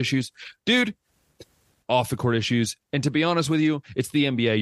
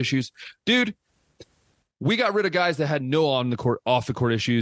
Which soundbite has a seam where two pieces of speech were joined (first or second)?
first